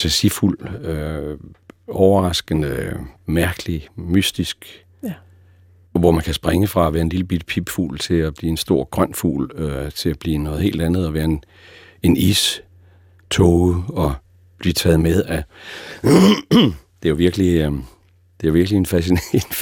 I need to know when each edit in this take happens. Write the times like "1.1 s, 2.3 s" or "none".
none